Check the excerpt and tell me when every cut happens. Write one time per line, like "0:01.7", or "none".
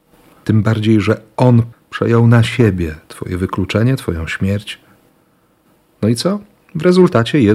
0:01.7